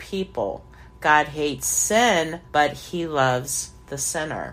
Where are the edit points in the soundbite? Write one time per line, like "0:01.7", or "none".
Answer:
0:02.5